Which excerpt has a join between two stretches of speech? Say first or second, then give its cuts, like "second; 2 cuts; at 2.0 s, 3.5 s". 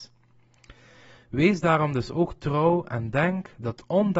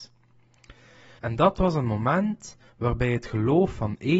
second; 1 cut; at 1.2 s